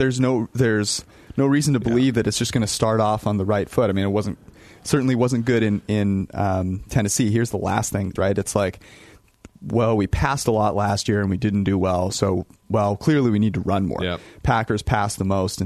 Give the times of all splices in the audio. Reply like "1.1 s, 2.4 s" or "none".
8.2 s